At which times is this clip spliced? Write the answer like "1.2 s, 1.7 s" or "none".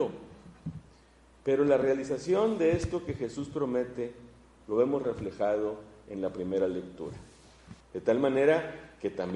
4.6 s, 7.8 s